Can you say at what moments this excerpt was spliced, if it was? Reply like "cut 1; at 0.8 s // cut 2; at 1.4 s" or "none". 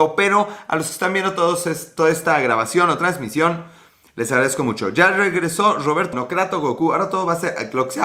cut 1; at 6.1 s